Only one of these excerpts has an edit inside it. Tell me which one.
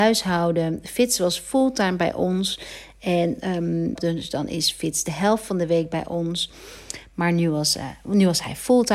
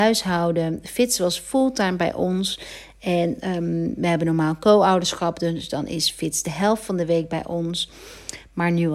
first; 1 cut; at 4.0 s

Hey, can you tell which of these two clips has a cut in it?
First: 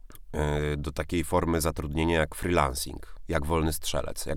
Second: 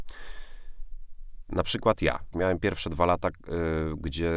second; 1 cut; at 2.3 s

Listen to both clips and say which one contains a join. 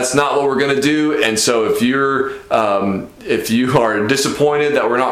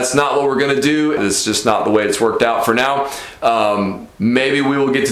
second; 1 cut; at 1.2 s

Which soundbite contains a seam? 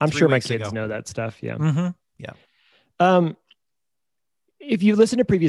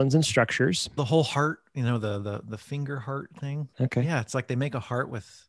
second; 2 cuts; at 1.0 s, 3.7 s

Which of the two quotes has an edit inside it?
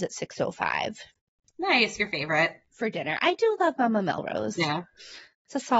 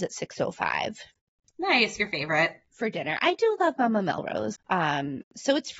second; 1 cut; at 4.5 s

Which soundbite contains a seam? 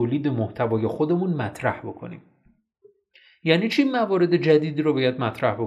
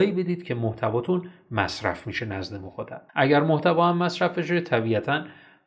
second; 1 cut; at 3.1 s

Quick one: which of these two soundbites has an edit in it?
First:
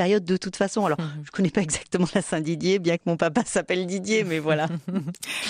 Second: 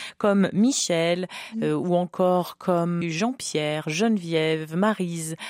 second; 1 cut; at 3.0 s

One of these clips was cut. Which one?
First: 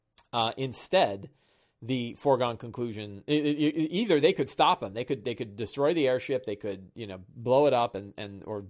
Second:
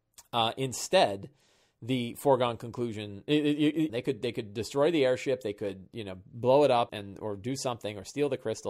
second; 2 cuts; at 3.9 s, 6.9 s

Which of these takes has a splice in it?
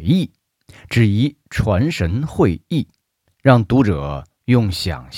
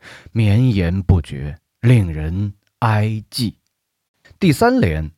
second; 1 cut; at 4.2 s

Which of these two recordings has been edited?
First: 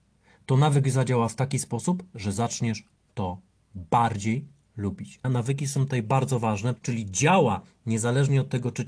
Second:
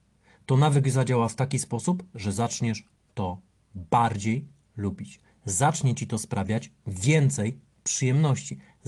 first; 2 cuts; at 5.2 s, 6.8 s

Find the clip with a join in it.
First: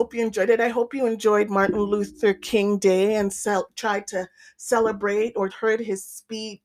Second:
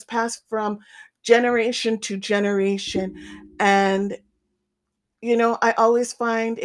first; 1 cut; at 5.5 s

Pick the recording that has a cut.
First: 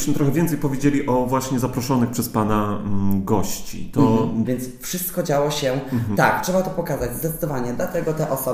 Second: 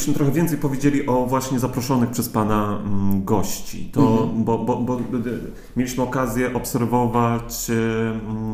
first; 2 cuts; at 4.4 s, 6.1 s

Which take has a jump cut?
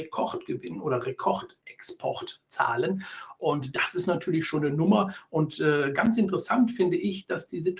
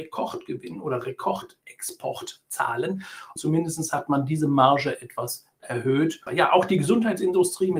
second; 2 cuts; at 3.4 s, 6.3 s

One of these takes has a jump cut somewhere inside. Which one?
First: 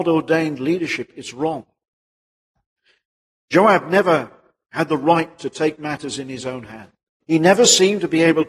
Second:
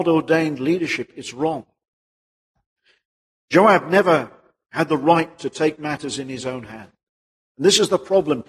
first; 1 cut; at 7.2 s

